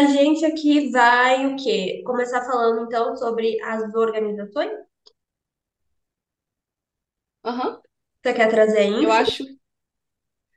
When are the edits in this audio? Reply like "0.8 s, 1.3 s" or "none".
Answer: none